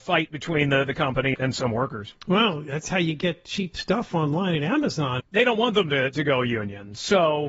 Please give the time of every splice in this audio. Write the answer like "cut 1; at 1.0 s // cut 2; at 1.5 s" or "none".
cut 1; at 1.3 s // cut 2; at 5.2 s